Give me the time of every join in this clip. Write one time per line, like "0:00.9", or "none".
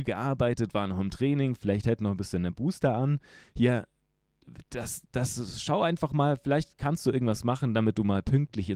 none